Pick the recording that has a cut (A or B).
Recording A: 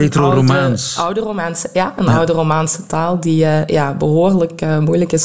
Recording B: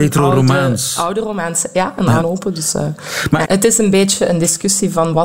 B